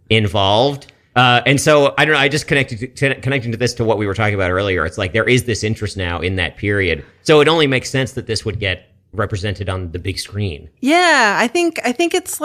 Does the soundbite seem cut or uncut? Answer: uncut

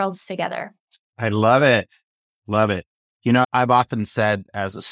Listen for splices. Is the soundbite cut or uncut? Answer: cut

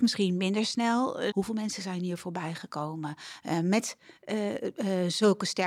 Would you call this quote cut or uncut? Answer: cut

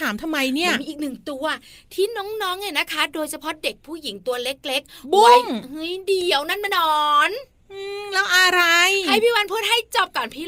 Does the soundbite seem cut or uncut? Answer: cut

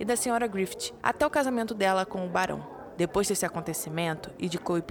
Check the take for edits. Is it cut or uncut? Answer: uncut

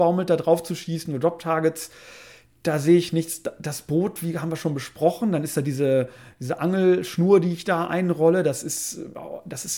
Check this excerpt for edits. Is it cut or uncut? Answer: uncut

